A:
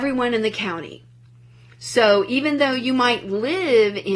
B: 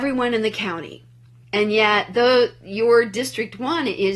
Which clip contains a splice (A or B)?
B